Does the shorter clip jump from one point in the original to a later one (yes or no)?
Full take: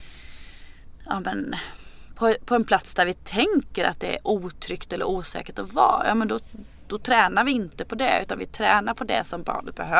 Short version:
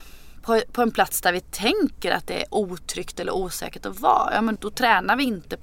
yes